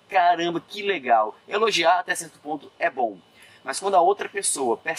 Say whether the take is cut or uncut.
uncut